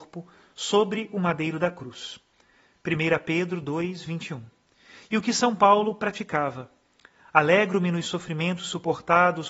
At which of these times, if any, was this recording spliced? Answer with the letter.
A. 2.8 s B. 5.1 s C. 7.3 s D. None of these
D